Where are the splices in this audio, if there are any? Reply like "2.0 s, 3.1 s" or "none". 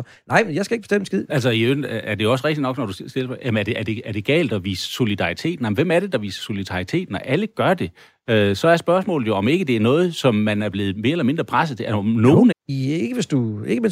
1.3 s, 12.5 s